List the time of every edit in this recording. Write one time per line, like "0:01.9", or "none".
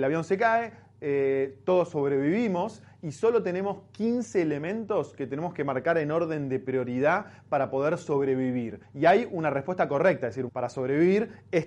0:08.8
0:10.5